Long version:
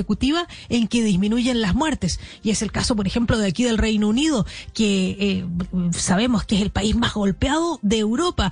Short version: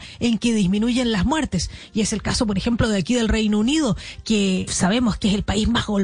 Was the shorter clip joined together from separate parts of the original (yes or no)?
yes